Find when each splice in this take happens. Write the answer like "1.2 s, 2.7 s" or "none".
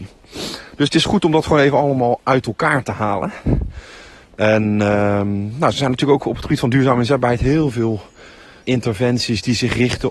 8.6 s